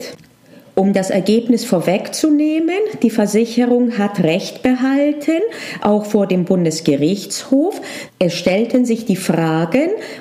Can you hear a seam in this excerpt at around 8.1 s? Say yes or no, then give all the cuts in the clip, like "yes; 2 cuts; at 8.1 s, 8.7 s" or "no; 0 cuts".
yes; 1 cut; at 8.1 s